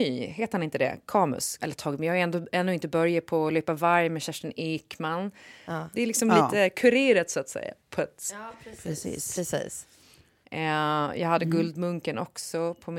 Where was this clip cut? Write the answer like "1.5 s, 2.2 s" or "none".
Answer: 1.6 s, 5.7 s, 10.4 s